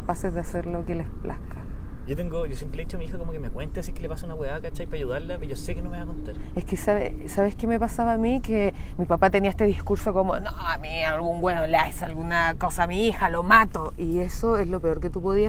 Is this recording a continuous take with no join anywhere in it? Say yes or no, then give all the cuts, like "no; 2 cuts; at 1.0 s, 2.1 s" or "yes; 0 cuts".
yes; 0 cuts